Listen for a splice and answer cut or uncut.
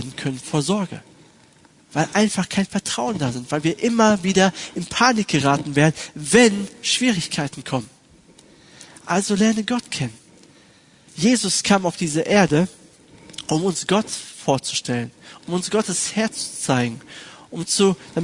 cut